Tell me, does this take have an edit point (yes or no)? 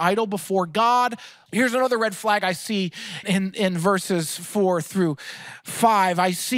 yes